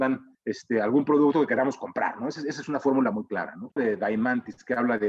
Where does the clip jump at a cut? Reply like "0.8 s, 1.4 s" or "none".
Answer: 3.8 s